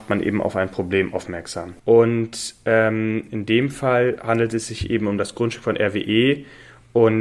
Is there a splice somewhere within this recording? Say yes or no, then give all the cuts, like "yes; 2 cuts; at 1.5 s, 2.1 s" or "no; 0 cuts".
yes; 1 cut; at 1.8 s